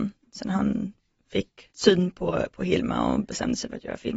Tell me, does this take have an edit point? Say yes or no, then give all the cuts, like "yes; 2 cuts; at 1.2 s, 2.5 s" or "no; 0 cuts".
yes; 1 cut; at 1.7 s